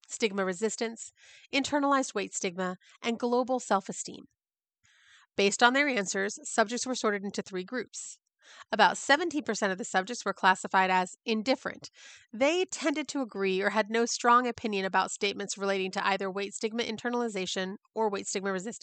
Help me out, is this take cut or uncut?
cut